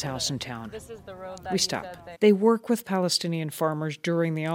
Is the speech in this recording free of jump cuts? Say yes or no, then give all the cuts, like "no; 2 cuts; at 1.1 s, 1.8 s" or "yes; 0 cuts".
no; 1 cut; at 2.1 s